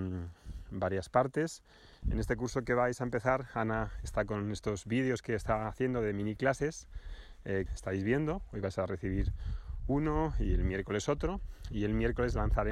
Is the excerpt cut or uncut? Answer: cut